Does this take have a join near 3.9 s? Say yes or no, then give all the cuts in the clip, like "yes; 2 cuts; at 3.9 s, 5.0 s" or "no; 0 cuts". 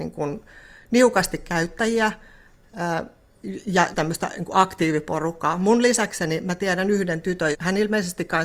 yes; 2 cuts; at 3.9 s, 7.5 s